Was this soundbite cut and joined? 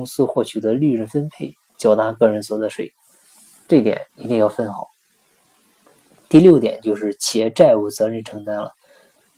yes; 1 cut; at 4.1 s

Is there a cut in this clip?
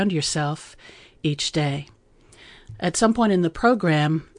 no; 0 cuts

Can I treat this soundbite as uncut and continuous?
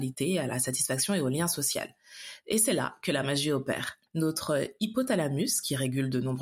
no; 1 cut; at 4.1 s

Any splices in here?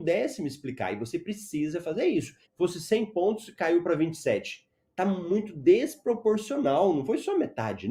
yes; 1 cut; at 2.4 s

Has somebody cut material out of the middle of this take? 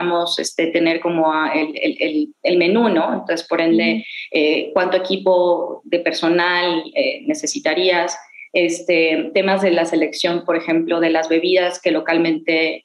no; 0 cuts

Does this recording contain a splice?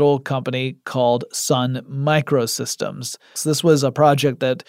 yes; 1 cut; at 3.3 s

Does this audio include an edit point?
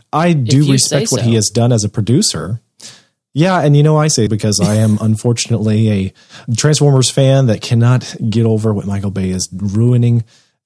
yes; 2 cuts; at 4.3 s, 6.5 s

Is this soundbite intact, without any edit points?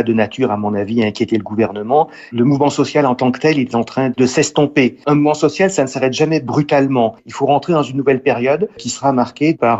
yes; 0 cuts

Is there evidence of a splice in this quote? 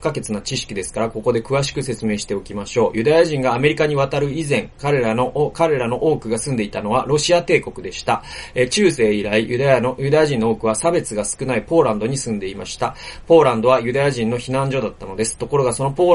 no; 0 cuts

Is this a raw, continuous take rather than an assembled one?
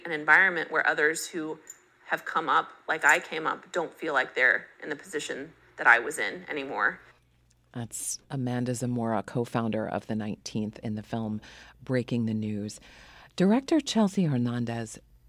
yes; 0 cuts

